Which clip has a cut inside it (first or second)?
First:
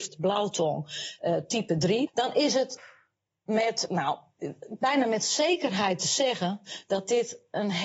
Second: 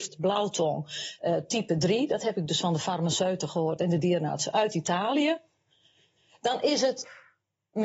first